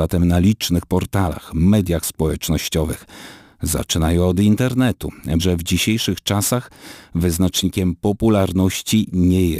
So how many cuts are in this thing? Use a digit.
1